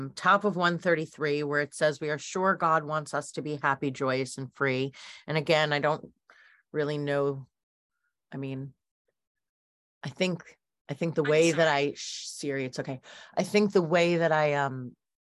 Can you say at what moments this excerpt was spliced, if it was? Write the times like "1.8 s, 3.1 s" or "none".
none